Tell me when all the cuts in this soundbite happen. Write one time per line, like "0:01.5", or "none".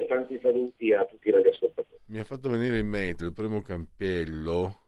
0:01.9
0:03.2